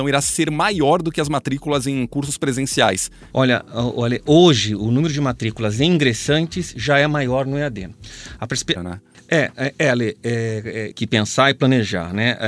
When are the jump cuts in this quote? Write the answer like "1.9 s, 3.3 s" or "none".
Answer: 3.3 s, 8.8 s, 10.9 s